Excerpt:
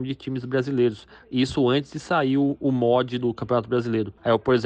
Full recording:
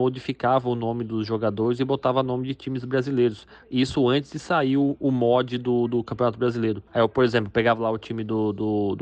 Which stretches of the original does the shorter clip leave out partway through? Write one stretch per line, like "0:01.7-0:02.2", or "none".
0:05.6-0:05.9